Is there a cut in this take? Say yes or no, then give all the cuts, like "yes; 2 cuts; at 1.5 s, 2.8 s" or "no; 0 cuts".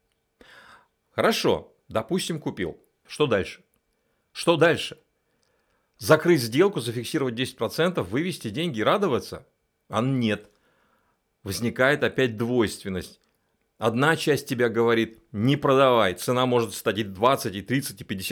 yes; 1 cut; at 3.1 s